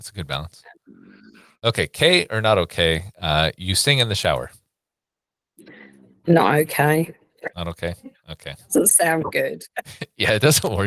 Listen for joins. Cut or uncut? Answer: cut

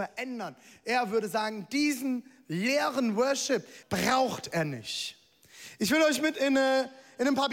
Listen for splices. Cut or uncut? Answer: cut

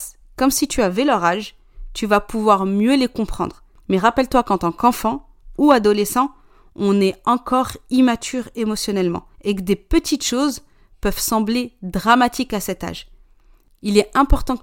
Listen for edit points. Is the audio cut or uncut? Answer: cut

